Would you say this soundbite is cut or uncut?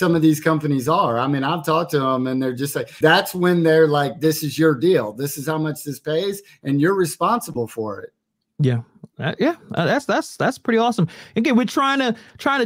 cut